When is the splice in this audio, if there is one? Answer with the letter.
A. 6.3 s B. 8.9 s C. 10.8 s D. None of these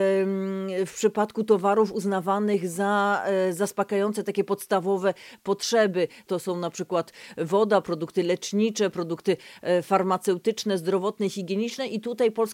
A